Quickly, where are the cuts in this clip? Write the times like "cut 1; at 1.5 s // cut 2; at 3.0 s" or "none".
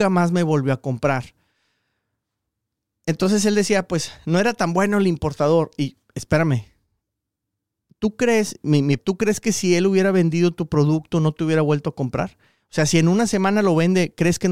cut 1; at 9.0 s